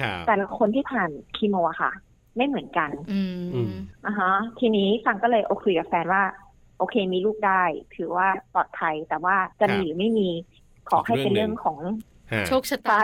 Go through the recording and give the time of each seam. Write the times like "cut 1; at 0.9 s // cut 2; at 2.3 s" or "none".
cut 1; at 5.6 s // cut 2; at 9.5 s